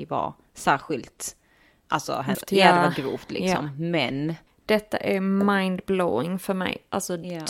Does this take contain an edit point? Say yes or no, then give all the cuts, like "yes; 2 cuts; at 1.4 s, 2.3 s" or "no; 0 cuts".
yes; 1 cut; at 2.3 s